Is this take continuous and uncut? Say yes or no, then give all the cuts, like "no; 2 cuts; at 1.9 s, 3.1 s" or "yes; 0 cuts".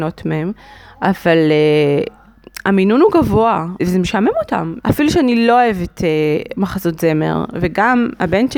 no; 2 cuts; at 3.8 s, 4.8 s